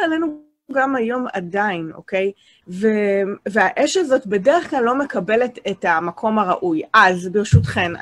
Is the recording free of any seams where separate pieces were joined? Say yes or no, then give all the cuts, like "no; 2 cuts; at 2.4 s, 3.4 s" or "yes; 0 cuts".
no; 1 cut; at 2.6 s